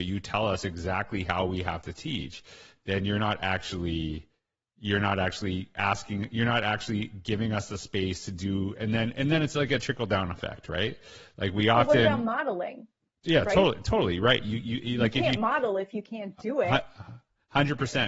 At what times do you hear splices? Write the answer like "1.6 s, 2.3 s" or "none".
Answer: none